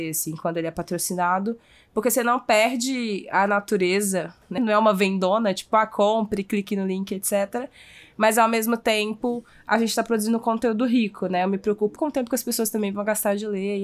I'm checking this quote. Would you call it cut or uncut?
cut